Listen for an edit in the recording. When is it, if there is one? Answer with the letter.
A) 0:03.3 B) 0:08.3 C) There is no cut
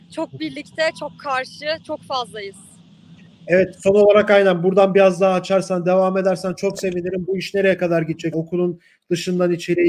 B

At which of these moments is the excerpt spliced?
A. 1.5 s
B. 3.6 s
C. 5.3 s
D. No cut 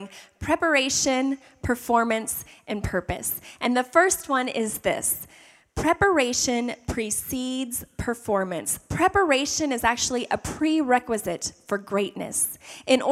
D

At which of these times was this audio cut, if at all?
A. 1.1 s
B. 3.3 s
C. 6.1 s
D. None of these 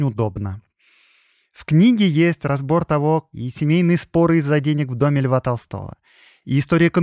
B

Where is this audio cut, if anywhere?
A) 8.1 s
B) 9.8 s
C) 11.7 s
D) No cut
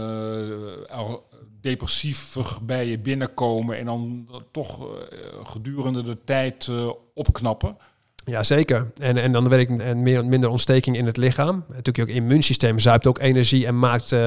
B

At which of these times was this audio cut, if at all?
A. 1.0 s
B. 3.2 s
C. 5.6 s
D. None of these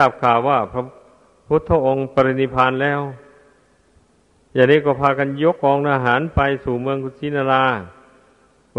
C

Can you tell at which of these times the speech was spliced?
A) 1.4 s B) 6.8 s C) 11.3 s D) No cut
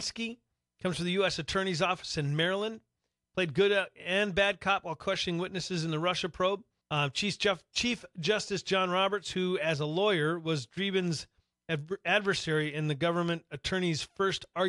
B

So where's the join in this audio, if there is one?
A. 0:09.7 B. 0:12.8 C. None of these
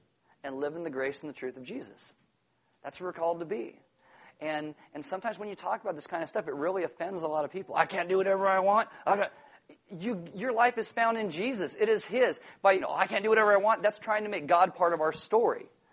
B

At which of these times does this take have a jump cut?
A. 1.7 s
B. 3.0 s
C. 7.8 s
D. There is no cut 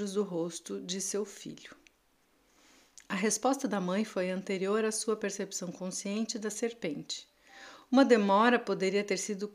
B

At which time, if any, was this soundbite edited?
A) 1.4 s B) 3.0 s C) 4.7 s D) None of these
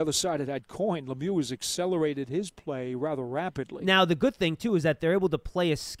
D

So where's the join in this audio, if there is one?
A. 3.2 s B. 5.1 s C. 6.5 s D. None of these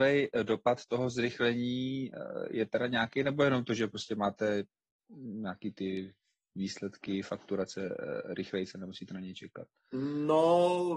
D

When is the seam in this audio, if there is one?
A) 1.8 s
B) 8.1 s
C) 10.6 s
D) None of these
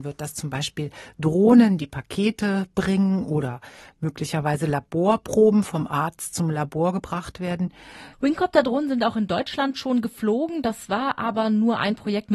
B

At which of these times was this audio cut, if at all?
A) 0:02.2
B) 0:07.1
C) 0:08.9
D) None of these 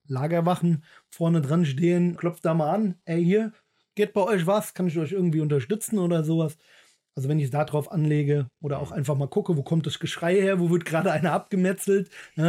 A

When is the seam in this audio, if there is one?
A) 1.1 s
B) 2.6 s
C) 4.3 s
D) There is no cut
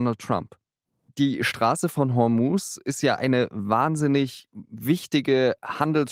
A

